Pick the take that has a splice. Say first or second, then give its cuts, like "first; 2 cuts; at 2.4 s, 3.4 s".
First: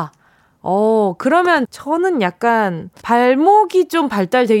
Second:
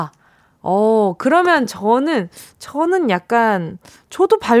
first; 2 cuts; at 1.7 s, 3.0 s